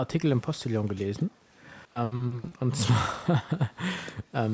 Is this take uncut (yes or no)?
no